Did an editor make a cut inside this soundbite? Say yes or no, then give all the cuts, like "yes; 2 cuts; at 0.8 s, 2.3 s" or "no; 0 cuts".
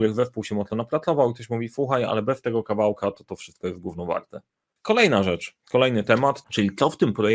yes; 2 cuts; at 4.8 s, 6.4 s